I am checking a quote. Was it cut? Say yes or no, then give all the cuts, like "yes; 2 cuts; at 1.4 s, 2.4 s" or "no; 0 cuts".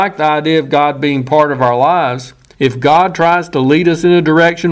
yes; 1 cut; at 2.5 s